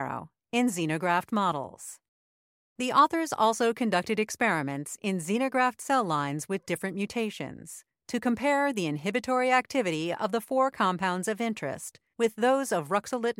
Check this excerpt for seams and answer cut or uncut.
uncut